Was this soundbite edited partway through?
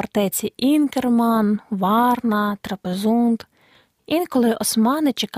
no; 0 cuts

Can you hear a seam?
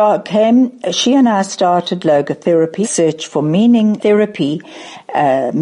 yes; 2 cuts; at 2.8 s, 4.0 s

